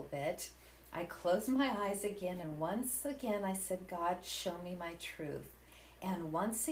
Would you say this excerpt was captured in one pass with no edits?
yes; 0 cuts

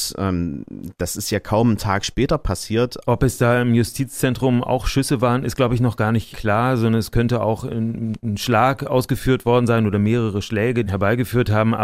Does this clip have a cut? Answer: yes; 3 cuts; at 3.0 s, 6.3 s, 10.9 s

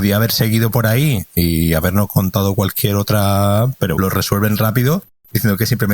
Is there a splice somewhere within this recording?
yes; 1 cut; at 3.9 s

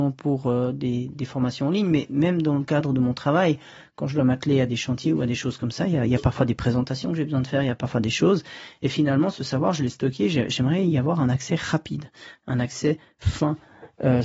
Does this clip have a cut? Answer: no; 0 cuts

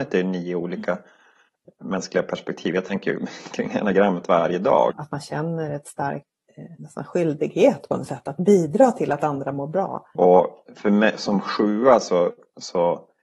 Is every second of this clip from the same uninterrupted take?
no; 2 cuts; at 4.9 s, 10.1 s

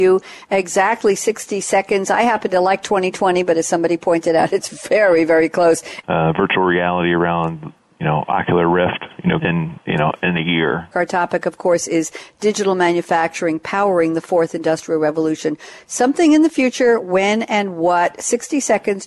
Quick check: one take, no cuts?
no; 3 cuts; at 6.0 s, 9.4 s, 10.9 s

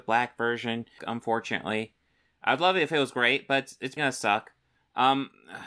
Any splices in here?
yes; 2 cuts; at 1.0 s, 4.0 s

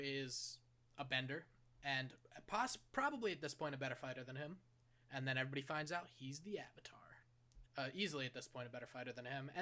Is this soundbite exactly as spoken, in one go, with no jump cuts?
no; 2 cuts; at 5.0 s, 7.6 s

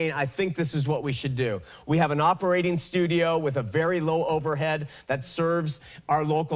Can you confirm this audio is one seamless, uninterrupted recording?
yes; 0 cuts

